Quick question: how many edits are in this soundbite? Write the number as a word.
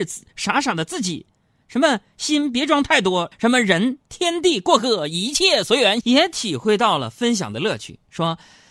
two